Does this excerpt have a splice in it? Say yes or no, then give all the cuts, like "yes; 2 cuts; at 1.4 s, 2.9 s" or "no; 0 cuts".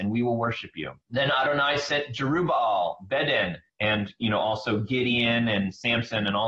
yes; 2 cuts; at 1.0 s, 3.7 s